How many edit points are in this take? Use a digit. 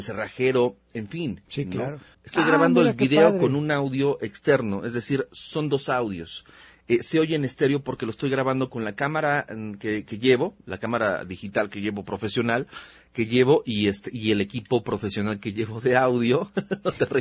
1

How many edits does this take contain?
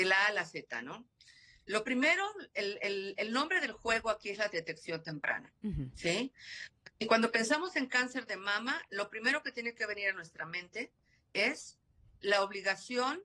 0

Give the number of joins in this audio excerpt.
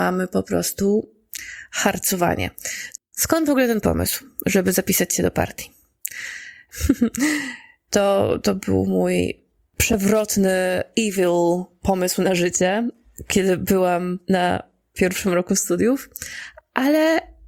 2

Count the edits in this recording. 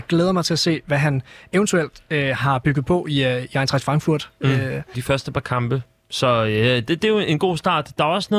1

